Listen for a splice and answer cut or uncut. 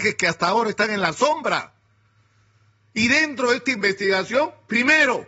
uncut